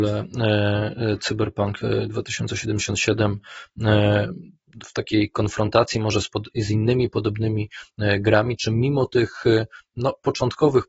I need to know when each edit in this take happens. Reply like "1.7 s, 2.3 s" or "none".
none

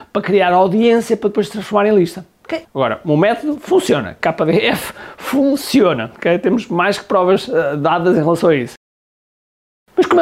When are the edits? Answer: 2.6 s

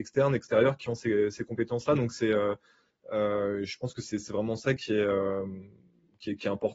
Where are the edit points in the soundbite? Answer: none

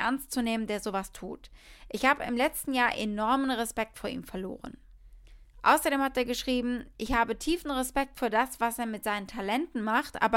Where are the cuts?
none

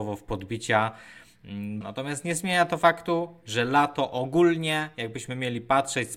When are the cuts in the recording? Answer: 1.8 s

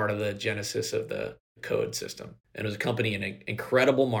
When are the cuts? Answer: 2.4 s

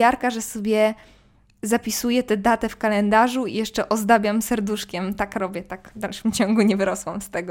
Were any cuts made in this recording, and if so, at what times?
none

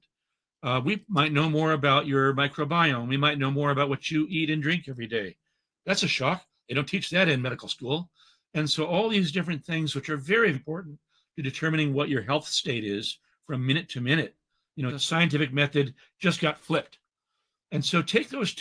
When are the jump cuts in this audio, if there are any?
10.5 s, 14.9 s

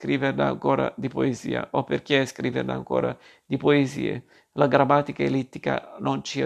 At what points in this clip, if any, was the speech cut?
none

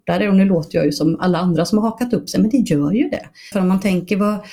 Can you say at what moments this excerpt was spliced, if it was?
3.5 s

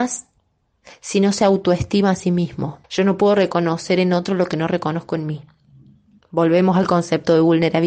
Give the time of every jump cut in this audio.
2.8 s, 6.2 s

